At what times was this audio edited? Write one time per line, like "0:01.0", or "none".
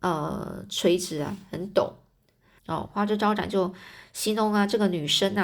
0:02.6

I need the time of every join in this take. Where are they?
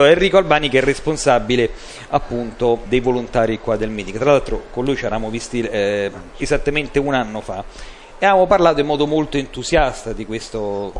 0:02.9

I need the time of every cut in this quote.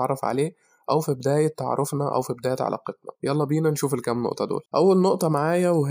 0:03.2
0:04.7

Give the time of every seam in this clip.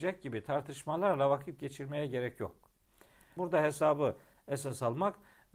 0:03.4

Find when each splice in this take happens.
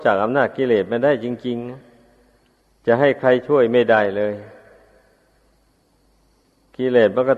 none

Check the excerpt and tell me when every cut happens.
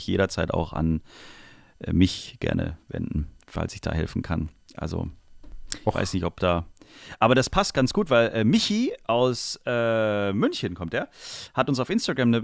none

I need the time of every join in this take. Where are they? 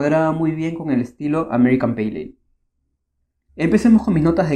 0:03.5

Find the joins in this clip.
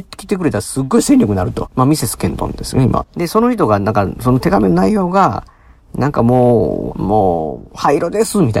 0:01.6
0:03.0
0:06.9

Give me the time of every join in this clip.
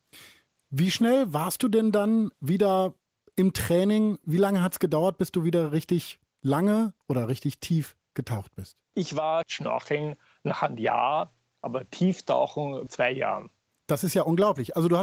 none

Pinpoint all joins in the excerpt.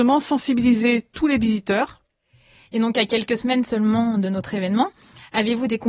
none

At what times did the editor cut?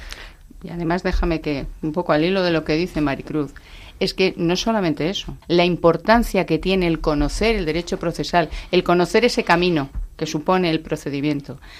0:05.4

